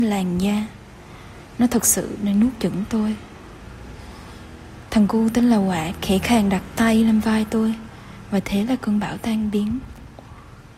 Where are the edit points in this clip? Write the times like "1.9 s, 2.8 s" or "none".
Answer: none